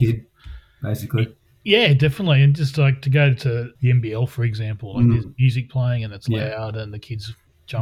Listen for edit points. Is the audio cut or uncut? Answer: uncut